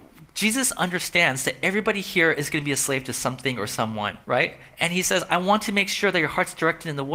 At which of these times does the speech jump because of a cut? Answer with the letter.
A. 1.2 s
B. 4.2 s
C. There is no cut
B